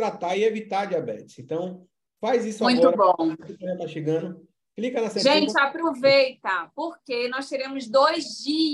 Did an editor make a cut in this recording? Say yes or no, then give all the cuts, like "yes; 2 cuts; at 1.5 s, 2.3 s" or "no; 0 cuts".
no; 0 cuts